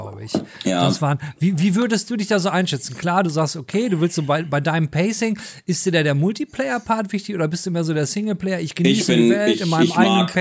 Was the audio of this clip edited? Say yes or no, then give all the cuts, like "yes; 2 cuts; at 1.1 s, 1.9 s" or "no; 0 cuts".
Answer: no; 0 cuts